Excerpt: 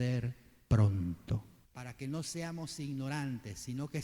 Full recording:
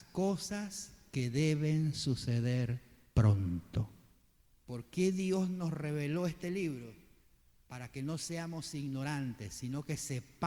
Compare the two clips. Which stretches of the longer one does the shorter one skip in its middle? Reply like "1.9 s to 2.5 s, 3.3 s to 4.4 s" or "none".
4.1 s to 7.6 s